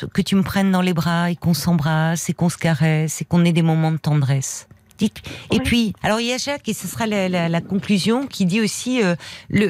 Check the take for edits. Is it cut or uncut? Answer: cut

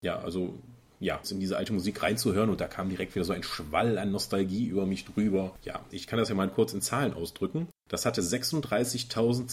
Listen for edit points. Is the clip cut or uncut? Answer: cut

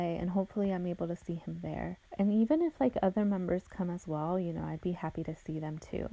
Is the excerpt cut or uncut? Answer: cut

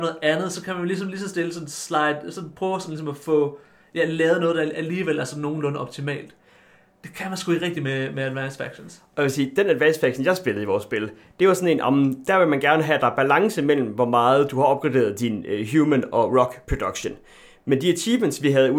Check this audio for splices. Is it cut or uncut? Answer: uncut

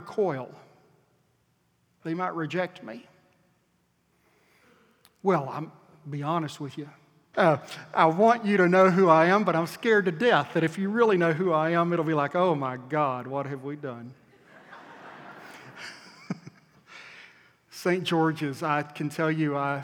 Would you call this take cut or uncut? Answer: cut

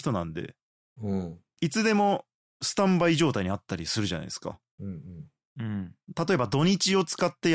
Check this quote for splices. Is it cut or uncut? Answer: uncut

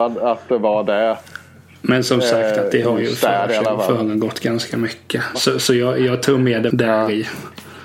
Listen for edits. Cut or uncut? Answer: cut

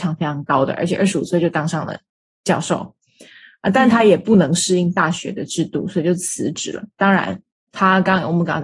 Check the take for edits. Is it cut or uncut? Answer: uncut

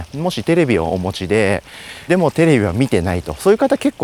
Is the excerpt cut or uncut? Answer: cut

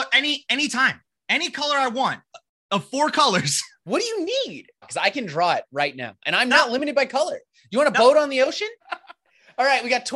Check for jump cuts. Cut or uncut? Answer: cut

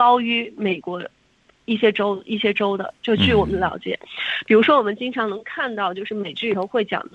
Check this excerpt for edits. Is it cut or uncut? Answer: uncut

